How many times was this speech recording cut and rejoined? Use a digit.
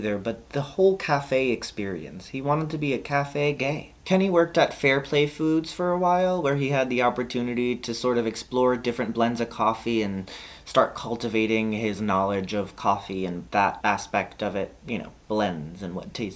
0